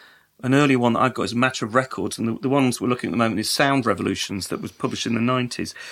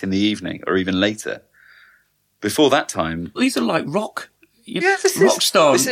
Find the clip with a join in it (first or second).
second